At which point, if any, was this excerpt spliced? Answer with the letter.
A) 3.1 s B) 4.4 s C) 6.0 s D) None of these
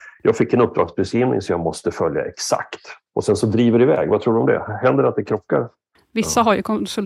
C